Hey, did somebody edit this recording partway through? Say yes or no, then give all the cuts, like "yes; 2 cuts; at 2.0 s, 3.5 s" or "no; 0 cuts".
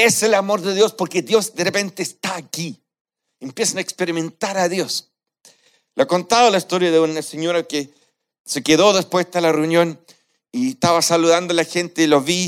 no; 0 cuts